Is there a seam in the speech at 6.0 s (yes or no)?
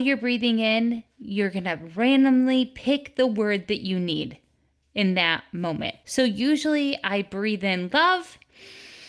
yes